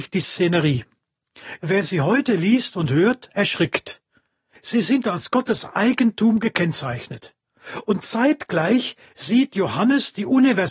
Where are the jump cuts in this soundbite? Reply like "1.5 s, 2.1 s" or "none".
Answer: 1.6 s, 4.6 s